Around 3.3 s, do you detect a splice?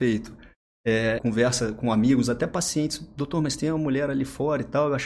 no; 1 cut; at 1.2 s

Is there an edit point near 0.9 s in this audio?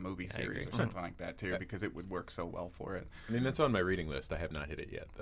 no; 1 cut; at 3.2 s

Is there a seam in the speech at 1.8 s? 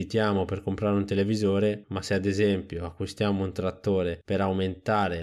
yes; 1 cut; at 1.8 s

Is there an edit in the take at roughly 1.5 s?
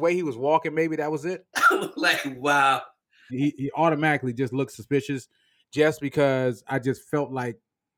yes; 2 cuts; at 1.5 s, 3.3 s

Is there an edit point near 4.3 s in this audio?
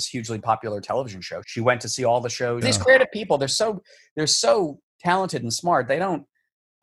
no; 2 cuts; at 1.4 s, 2.6 s

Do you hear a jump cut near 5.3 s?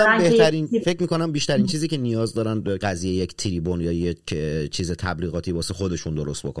no; 1 cut; at 2.8 s

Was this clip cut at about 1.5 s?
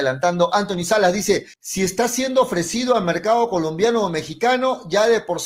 yes; 1 cut; at 1.5 s

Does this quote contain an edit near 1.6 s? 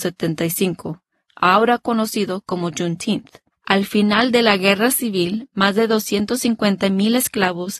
no; 1 cut; at 3.5 s

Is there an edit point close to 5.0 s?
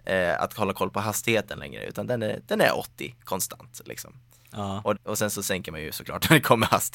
yes; 1 cut; at 5.0 s

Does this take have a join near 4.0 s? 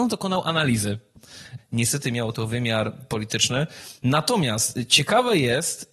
no; 1 cut; at 1.6 s

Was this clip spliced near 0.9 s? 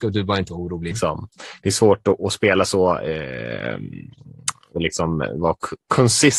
yes; 1 cut; at 0.9 s

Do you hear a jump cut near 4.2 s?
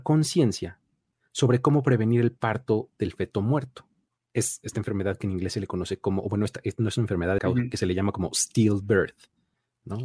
no; 1 cut; at 7.4 s

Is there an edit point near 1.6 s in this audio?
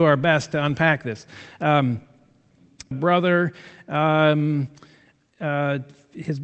no; 2 cuts; at 2.9 s, 5.3 s

